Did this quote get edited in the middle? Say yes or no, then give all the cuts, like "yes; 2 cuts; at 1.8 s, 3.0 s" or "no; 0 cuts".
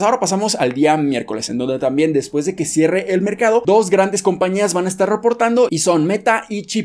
no; 0 cuts